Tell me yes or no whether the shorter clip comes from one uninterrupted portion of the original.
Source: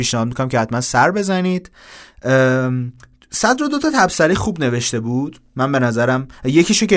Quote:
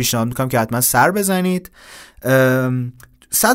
yes